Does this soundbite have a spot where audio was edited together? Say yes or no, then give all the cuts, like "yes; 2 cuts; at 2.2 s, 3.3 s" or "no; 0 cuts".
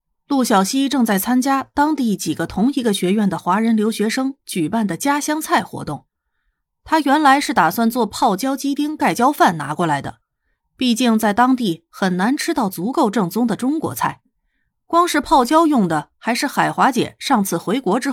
no; 0 cuts